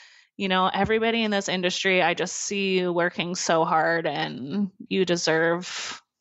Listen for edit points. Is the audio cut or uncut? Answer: cut